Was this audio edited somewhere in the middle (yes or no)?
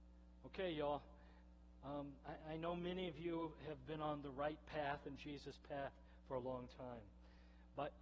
no